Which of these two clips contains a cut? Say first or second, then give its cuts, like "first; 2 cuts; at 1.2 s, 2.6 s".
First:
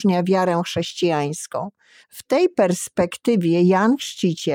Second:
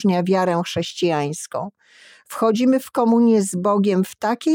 first; 1 cut; at 2.0 s